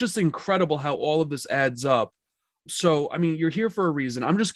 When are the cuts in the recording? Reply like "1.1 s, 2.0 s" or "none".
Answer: none